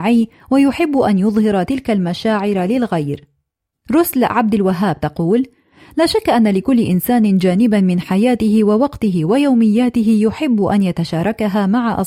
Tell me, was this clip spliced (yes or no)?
yes